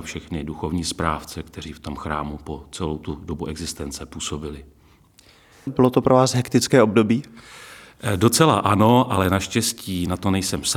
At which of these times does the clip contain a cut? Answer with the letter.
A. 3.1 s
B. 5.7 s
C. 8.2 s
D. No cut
B